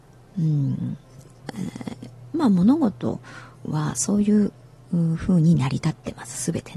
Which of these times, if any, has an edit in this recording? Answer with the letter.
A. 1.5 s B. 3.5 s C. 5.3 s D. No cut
B